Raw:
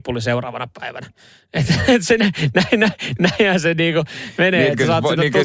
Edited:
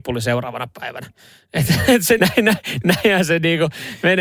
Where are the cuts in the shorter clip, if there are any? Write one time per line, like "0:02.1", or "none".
0:02.2